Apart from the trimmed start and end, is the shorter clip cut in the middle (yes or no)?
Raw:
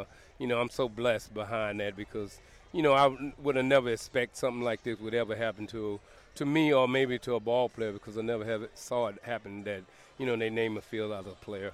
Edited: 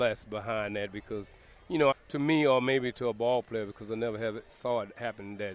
yes